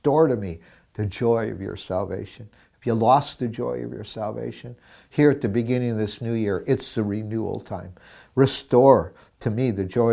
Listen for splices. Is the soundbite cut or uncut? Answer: uncut